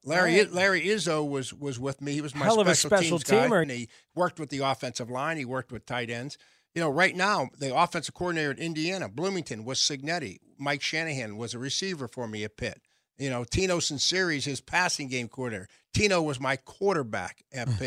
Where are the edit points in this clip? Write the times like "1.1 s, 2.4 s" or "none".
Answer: 3.6 s